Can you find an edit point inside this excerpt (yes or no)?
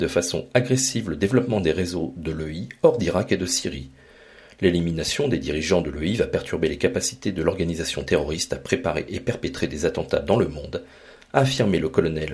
no